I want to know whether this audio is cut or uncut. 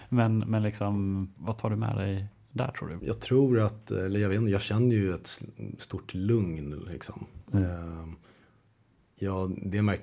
cut